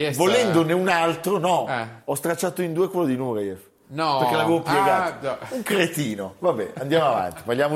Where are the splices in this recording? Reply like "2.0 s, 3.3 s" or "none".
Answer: none